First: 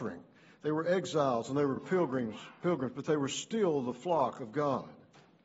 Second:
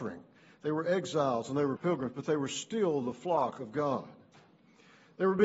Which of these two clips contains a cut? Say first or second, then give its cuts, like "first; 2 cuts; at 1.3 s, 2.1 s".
second; 1 cut; at 1.8 s